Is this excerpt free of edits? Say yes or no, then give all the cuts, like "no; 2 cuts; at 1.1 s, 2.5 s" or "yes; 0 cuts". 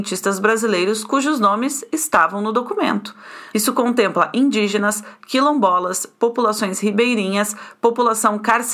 no; 1 cut; at 3.5 s